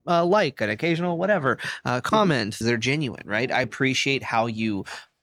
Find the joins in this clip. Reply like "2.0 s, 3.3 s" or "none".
2.6 s, 3.6 s